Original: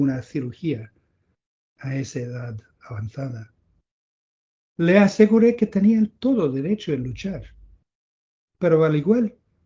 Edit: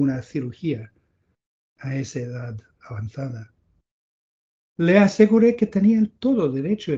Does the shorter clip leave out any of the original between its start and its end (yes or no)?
no